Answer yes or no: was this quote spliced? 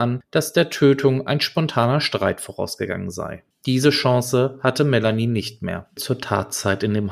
yes